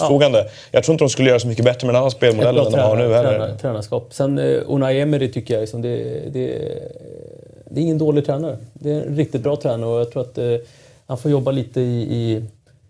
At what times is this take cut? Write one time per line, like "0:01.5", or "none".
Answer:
none